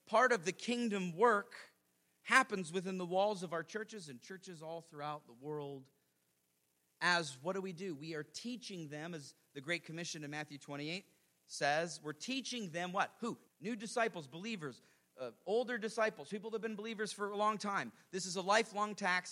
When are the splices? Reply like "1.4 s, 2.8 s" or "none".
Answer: 13.5 s